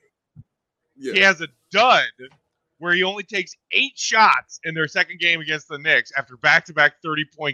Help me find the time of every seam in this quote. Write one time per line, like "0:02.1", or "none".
none